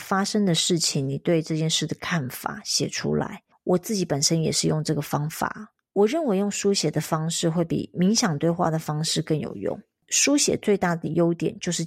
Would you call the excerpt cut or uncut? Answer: uncut